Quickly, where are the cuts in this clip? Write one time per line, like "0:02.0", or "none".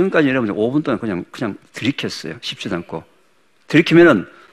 none